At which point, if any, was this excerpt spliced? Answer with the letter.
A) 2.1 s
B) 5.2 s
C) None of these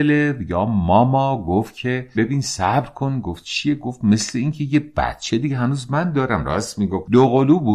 A